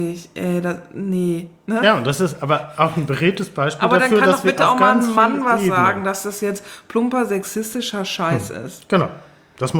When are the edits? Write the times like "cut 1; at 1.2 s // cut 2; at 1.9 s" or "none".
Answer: none